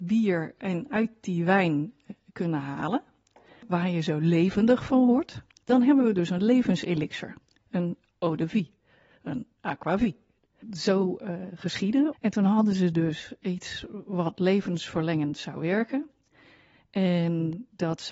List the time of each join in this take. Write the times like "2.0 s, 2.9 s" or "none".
12.1 s

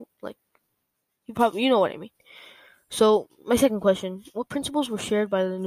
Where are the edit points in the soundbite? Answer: none

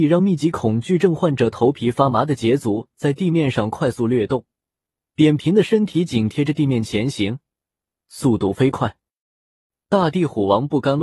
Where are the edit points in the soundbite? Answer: 7.9 s

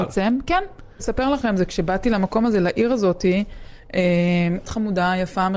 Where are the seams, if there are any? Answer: 1.0 s, 4.6 s

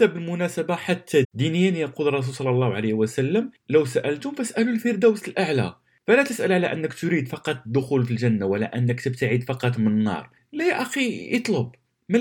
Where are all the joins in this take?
1.2 s

